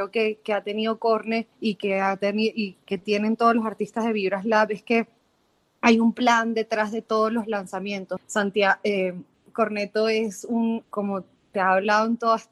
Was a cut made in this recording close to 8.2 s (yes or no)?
yes